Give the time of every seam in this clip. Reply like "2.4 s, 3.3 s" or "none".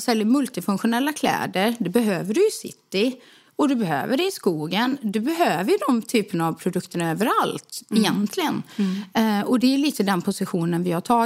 none